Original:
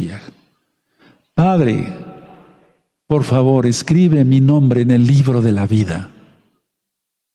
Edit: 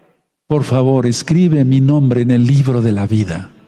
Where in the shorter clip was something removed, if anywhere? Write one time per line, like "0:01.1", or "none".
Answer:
none